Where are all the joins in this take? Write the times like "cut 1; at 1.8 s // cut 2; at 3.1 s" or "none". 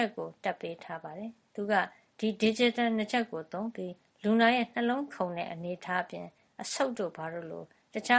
none